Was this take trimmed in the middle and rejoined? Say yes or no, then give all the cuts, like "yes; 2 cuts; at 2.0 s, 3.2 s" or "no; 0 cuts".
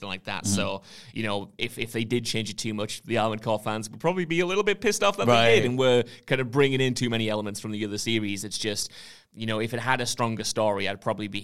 no; 0 cuts